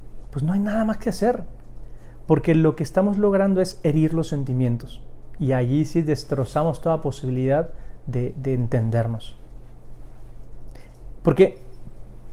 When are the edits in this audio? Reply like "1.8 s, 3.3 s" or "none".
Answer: none